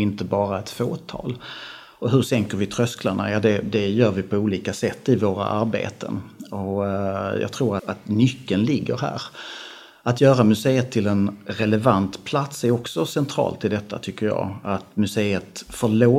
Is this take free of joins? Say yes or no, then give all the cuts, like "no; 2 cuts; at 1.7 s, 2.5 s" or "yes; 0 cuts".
no; 1 cut; at 7.8 s